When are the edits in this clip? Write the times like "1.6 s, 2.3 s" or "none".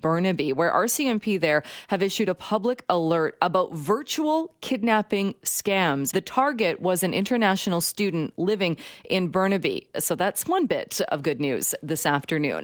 6.1 s, 9.9 s

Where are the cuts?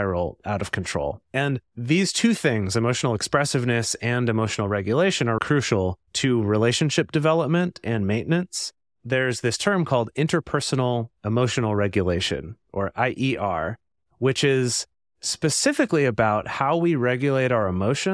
1.2 s, 5.4 s

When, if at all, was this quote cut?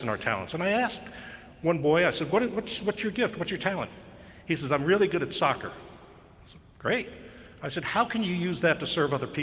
none

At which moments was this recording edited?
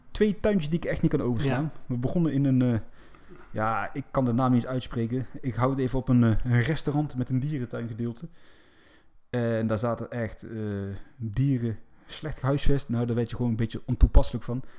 none

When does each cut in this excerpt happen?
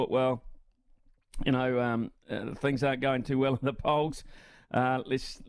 none

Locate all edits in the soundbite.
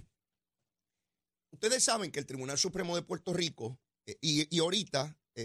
none

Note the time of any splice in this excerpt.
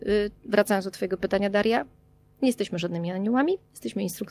none

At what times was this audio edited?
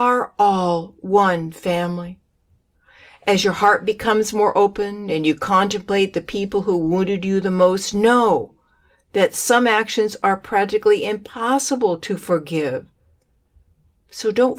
none

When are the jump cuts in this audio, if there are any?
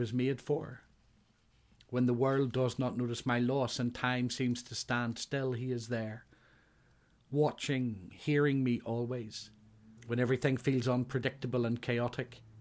8.1 s, 10.0 s

